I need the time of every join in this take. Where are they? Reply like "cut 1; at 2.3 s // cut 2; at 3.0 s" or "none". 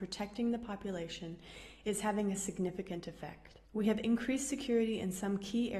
cut 1; at 3.7 s